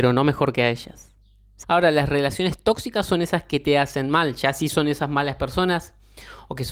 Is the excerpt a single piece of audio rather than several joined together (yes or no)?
no